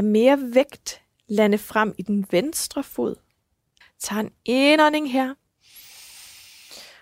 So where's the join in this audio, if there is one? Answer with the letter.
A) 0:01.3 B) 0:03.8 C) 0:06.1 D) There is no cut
B